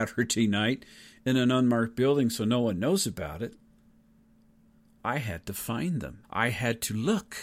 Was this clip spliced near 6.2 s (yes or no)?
yes